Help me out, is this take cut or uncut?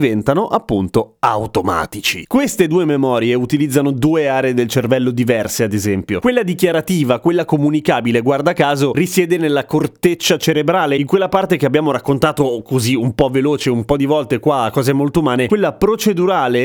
cut